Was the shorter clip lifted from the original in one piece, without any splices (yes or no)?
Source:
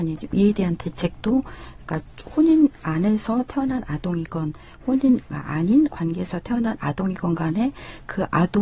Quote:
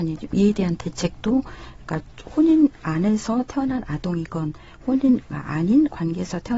yes